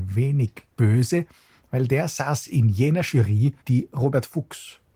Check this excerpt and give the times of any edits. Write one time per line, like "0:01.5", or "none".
0:03.6